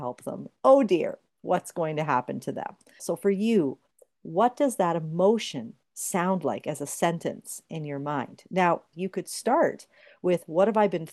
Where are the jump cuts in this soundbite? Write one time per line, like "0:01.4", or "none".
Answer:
0:03.0
0:08.9